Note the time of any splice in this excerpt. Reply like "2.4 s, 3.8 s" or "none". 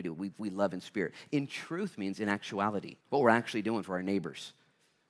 3.0 s